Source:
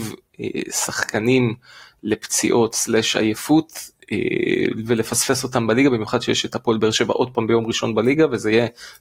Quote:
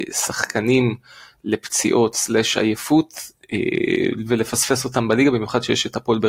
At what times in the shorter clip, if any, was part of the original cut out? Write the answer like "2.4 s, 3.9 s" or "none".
none